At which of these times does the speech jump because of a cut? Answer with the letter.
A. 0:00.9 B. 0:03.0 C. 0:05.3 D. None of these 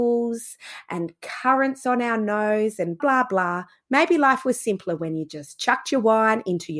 B